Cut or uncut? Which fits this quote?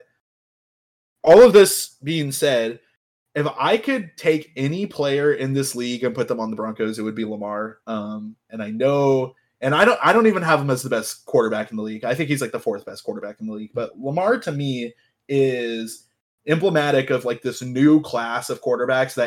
uncut